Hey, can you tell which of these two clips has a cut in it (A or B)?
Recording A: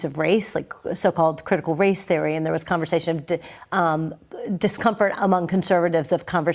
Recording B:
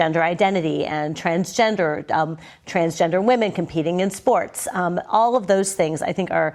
A